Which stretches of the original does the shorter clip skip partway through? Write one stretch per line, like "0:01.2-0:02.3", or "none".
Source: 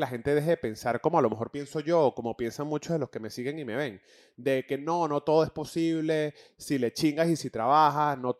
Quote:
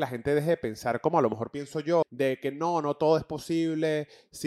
0:02.0-0:04.3